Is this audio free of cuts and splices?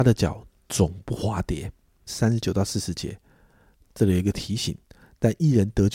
no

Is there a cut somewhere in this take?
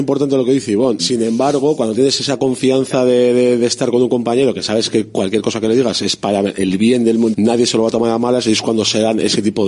yes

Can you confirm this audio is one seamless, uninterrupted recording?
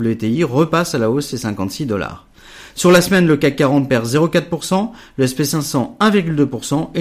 yes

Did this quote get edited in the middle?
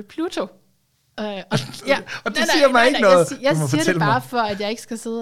no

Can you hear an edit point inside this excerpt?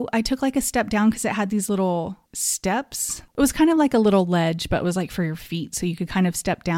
no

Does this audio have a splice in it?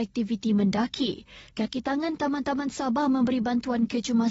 yes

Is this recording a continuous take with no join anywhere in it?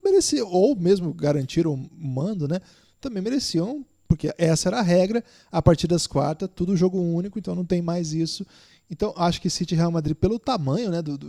yes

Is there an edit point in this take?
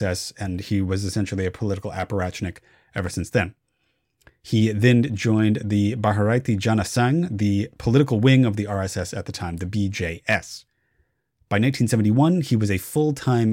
no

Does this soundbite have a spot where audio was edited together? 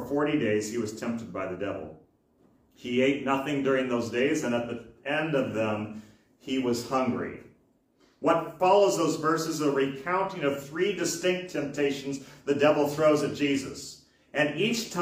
no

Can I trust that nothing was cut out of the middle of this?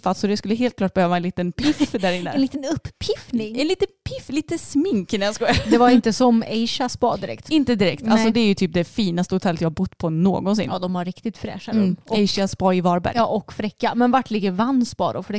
yes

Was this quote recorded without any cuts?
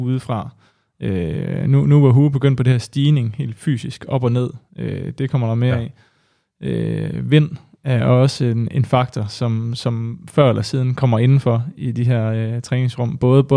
yes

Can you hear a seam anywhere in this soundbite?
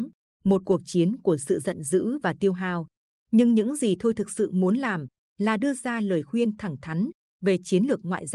yes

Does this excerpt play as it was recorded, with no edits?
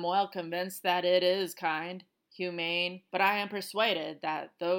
no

